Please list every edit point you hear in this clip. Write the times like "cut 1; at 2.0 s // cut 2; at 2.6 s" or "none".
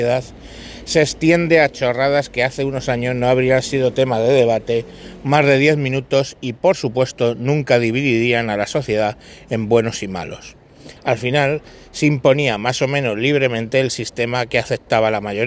cut 1; at 11.0 s